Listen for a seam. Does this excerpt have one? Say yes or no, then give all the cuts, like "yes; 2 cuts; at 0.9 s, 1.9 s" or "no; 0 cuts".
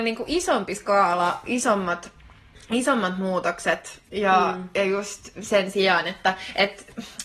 no; 0 cuts